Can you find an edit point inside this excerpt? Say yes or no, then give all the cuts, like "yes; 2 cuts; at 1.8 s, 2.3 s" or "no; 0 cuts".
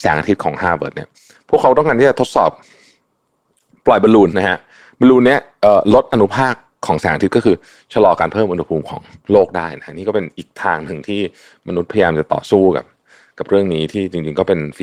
yes; 1 cut; at 4.3 s